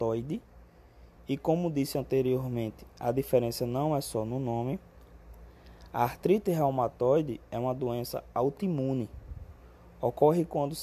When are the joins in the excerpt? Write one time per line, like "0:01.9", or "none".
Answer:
none